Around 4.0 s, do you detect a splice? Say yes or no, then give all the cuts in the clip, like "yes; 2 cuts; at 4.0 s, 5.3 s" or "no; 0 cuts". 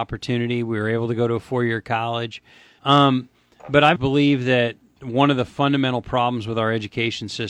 yes; 2 cuts; at 2.8 s, 4.0 s